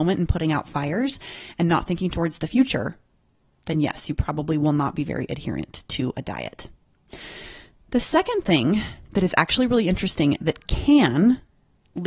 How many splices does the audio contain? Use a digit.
0